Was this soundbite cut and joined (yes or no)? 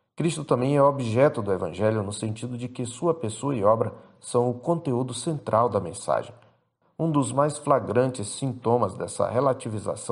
yes